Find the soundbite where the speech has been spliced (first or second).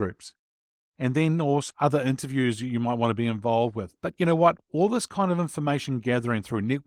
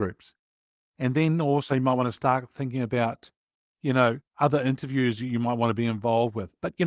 first